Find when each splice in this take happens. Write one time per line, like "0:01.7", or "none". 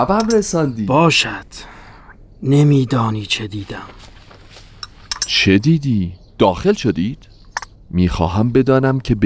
0:06.3
0:07.7